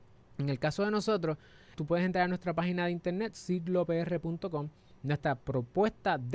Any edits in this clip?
yes; 2 cuts; at 1.7 s, 5.0 s

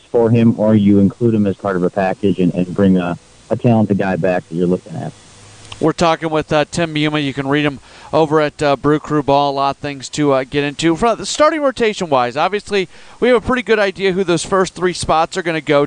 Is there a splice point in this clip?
no; 0 cuts

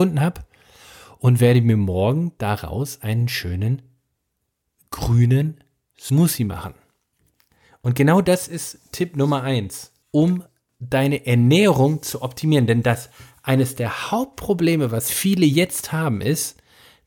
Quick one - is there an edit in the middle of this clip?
yes; 1 cut; at 10.0 s

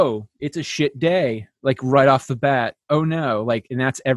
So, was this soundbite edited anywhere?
no; 0 cuts

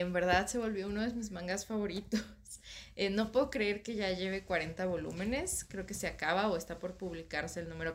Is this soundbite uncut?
yes; 0 cuts

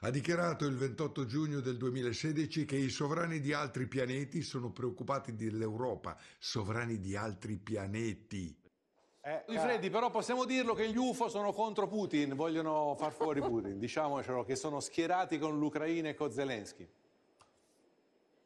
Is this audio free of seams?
no; 1 cut; at 9.5 s

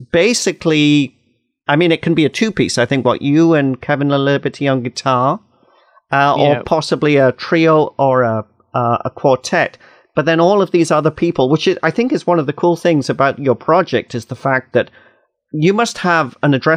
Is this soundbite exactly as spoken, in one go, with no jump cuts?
yes; 0 cuts

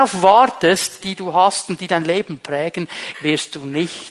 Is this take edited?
yes; 2 cuts; at 1.0 s, 3.1 s

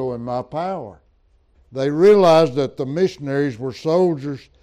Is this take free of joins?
no; 1 cut; at 1.5 s

